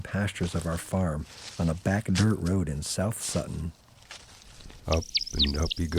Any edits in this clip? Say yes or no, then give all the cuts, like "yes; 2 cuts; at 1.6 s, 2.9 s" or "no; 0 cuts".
yes; 1 cut; at 4.8 s